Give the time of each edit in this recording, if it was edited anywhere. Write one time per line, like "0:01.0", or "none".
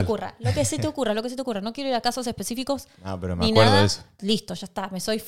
0:04.2